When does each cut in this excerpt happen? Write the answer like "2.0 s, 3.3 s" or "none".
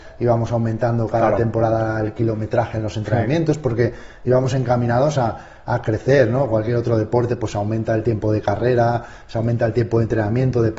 none